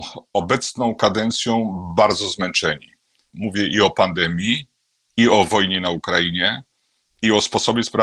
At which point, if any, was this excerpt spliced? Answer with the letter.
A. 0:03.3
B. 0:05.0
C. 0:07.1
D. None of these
A